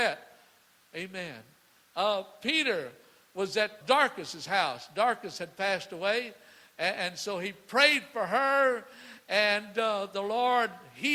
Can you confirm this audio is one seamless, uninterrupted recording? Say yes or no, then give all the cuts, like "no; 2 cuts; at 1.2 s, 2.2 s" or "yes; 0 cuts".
no; 1 cut; at 3.8 s